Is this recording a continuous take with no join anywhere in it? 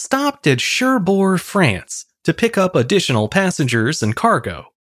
yes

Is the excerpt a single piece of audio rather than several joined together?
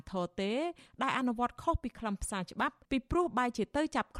no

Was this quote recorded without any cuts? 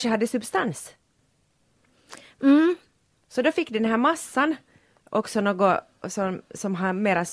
yes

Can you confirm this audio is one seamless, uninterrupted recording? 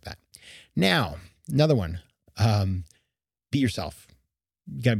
yes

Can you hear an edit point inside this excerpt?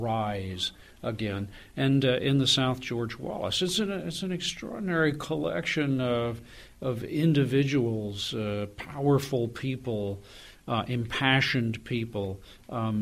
no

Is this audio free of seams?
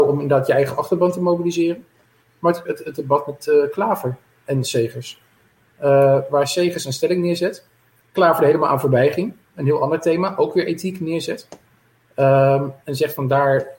no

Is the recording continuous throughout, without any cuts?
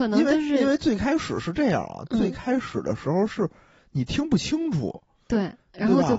yes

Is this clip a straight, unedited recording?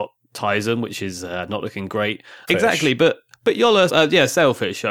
no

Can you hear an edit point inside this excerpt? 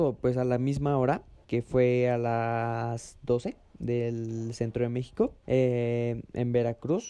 yes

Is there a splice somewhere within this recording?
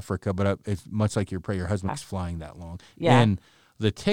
yes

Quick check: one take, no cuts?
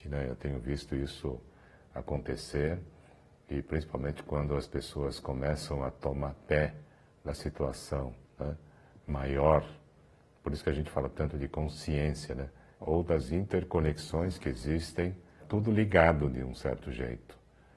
no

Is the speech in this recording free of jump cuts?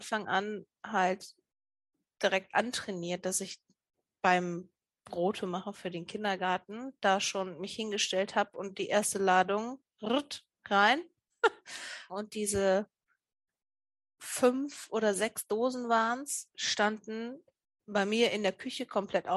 no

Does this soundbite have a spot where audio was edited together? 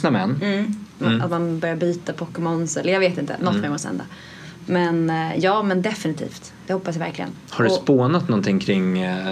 yes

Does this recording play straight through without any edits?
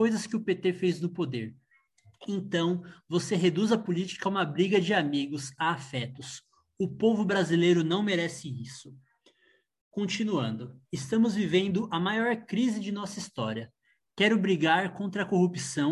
no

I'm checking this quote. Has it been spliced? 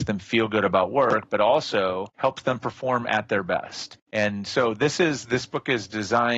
no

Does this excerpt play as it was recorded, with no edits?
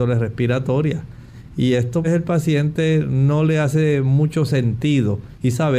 no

